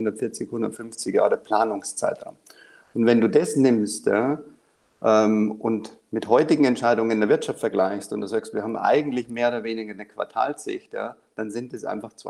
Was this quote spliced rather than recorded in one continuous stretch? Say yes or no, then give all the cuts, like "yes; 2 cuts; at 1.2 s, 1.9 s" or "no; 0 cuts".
no; 0 cuts